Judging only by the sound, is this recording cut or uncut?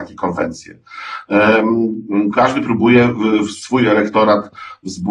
uncut